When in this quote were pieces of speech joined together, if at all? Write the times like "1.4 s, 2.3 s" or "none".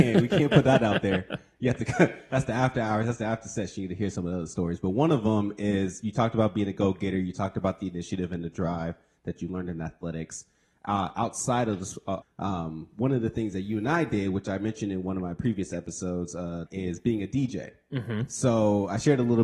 12.2 s, 16.7 s